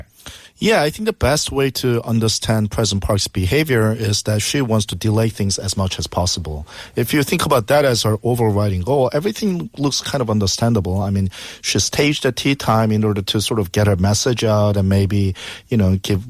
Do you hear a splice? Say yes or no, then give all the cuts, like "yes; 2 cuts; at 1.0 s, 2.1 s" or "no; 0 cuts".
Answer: no; 0 cuts